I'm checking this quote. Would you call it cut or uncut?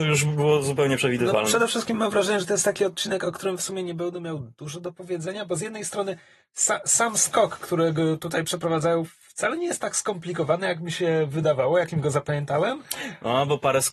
uncut